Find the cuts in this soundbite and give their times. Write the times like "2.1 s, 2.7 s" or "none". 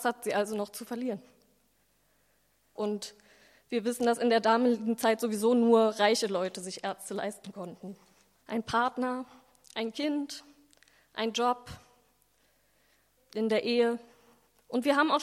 2.8 s, 8.4 s, 13.2 s